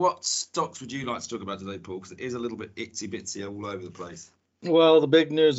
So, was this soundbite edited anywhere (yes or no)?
no